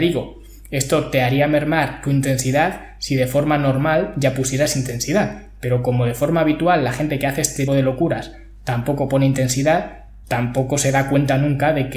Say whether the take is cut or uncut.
cut